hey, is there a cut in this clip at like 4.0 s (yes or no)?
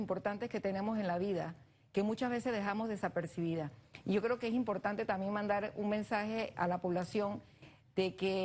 no